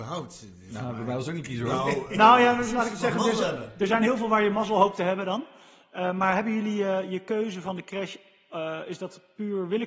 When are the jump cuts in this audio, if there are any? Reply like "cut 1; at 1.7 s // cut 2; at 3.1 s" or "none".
none

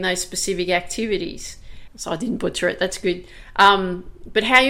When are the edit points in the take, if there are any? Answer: cut 1; at 1.9 s

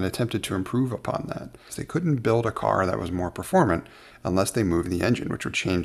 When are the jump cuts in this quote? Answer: cut 1; at 1.7 s

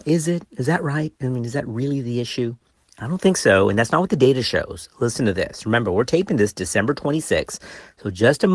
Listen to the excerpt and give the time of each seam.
none

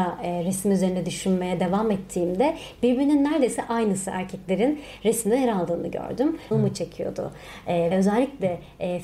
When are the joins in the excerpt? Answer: cut 1; at 6.5 s // cut 2; at 7.9 s

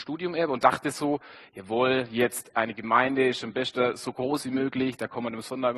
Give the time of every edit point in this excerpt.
none

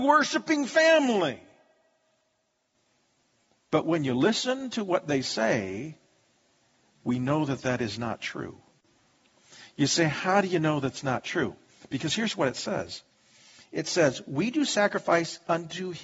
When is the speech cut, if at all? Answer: none

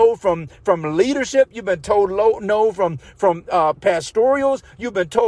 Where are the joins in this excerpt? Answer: cut 1; at 3.7 s

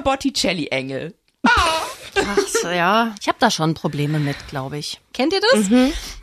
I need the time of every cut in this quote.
cut 1; at 3.1 s // cut 2; at 5.1 s

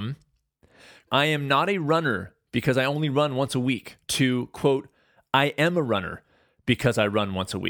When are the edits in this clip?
cut 1; at 1.1 s // cut 2; at 4.0 s

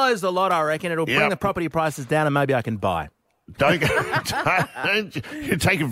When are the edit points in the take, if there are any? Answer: none

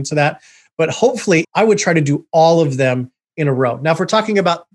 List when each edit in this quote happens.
cut 1; at 1.4 s

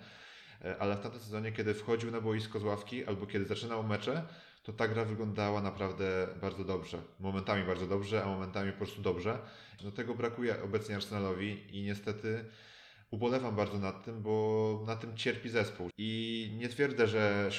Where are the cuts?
cut 1; at 9.8 s // cut 2; at 15.9 s

